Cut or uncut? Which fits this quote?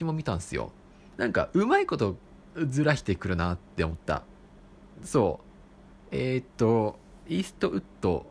cut